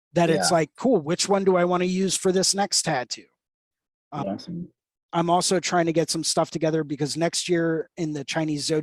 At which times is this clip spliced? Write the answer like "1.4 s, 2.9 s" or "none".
4.2 s